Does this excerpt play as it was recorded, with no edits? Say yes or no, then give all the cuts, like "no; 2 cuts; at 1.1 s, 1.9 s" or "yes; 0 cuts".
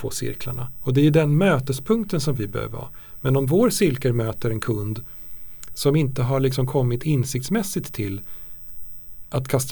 yes; 0 cuts